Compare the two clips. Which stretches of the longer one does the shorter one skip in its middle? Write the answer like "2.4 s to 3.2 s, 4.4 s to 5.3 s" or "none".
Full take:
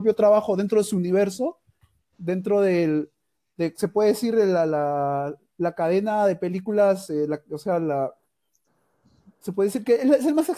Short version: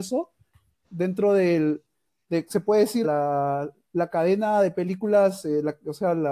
4.3 s to 4.7 s